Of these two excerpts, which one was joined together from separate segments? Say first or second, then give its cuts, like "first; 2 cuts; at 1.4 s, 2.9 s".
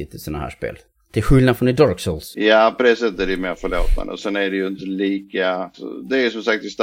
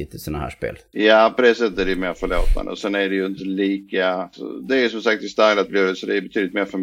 second; 1 cut; at 0.9 s